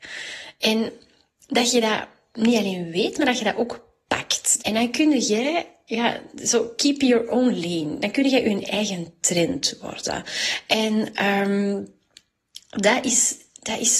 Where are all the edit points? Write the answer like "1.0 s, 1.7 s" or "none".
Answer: 4.6 s